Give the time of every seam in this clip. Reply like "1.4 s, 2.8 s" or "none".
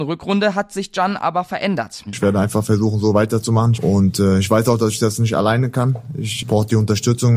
2.1 s, 3.7 s